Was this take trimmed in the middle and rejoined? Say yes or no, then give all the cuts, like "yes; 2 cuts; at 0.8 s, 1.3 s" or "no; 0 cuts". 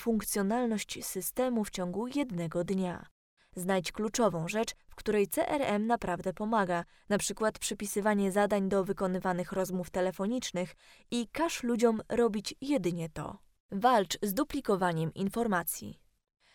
yes; 2 cuts; at 3.4 s, 13.6 s